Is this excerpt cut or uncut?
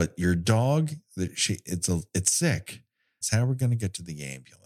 cut